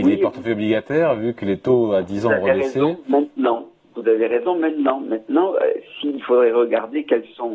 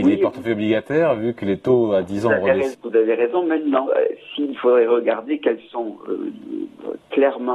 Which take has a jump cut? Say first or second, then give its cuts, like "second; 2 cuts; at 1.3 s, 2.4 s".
second; 2 cuts; at 2.7 s, 3.9 s